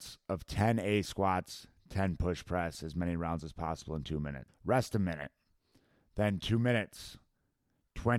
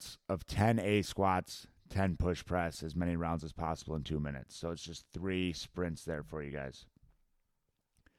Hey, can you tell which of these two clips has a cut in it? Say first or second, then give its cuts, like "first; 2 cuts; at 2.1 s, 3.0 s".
first; 1 cut; at 4.5 s